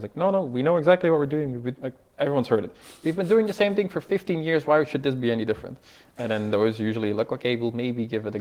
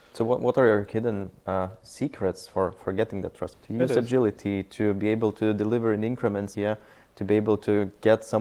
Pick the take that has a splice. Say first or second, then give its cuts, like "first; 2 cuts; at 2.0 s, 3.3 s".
second; 2 cuts; at 3.5 s, 6.5 s